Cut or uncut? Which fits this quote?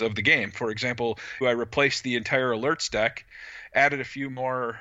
cut